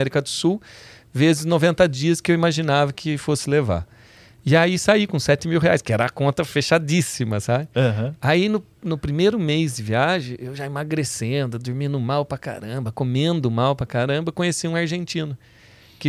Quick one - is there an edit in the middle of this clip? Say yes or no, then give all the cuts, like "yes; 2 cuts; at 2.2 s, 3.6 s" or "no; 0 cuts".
no; 0 cuts